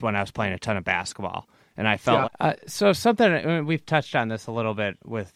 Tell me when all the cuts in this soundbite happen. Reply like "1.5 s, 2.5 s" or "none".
2.2 s